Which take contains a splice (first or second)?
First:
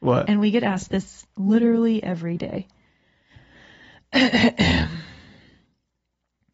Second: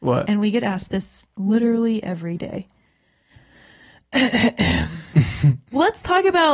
second